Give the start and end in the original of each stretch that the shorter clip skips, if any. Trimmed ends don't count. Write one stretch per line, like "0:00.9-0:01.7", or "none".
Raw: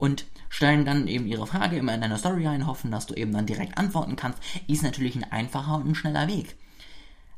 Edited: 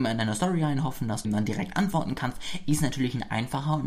0:03.1-0:03.3

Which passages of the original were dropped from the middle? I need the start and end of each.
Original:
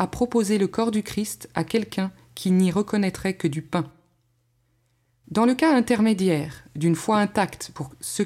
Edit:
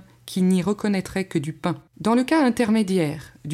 0:04.0-0:05.2

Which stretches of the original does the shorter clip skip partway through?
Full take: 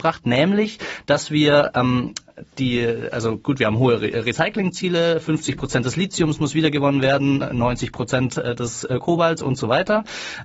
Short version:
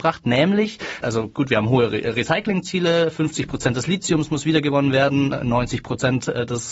0:01.0-0:03.1

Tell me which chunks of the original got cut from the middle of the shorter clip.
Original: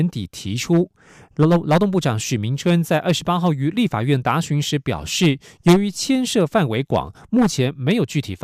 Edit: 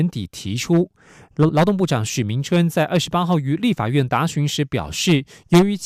0:01.5-0:01.6

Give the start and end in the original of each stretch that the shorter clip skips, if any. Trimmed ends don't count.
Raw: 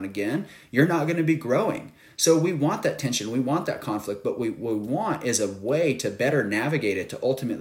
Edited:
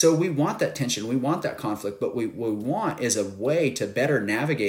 none

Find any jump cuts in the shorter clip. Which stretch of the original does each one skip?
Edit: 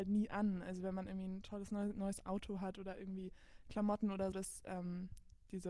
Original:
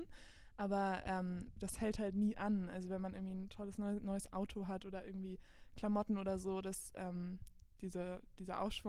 0:06.4-0:06.6

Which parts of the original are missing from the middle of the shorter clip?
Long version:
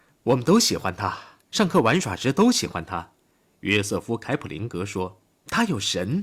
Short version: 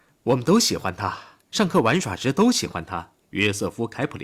0:03.2-0:03.5

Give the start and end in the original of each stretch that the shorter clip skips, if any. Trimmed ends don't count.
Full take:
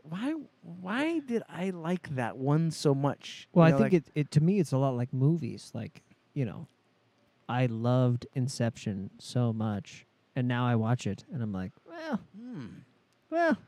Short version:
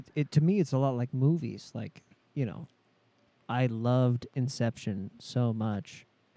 none

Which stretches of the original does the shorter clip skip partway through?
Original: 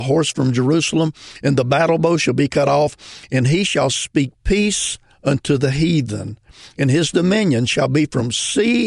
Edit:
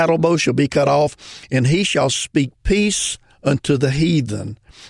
none

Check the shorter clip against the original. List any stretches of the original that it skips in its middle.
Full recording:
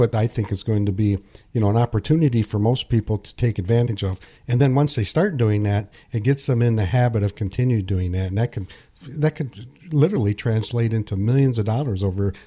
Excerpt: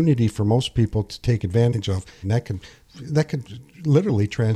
0:04.4-0:08.3

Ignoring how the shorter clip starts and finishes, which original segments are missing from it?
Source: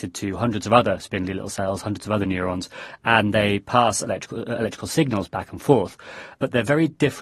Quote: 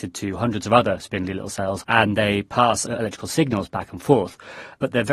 0:01.8-0:03.0
0:04.0-0:04.4

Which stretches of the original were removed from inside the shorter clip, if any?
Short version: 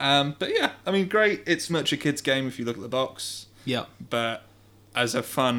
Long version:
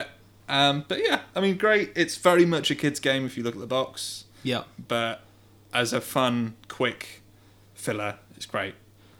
0:02.2-0:02.5

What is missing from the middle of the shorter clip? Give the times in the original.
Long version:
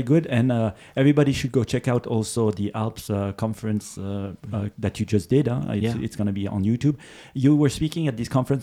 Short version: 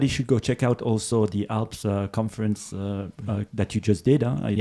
none

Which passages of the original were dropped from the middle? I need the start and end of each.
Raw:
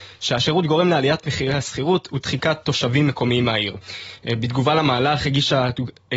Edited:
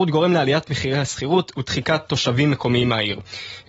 none

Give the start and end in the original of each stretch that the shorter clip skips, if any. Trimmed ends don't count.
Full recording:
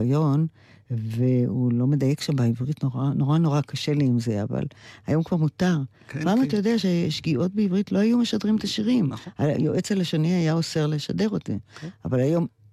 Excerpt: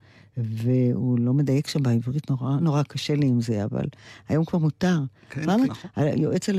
0:03.1-0:03.4
0:06.5-0:09.1

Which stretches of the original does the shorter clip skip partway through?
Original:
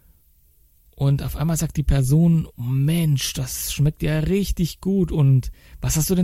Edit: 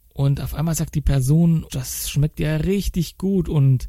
0:02.5-0:03.3

